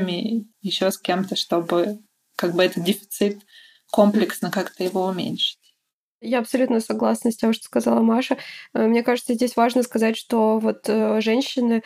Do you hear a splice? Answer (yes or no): no